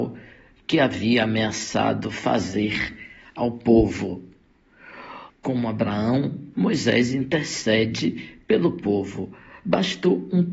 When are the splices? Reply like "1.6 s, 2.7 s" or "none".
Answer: 5.3 s, 6.5 s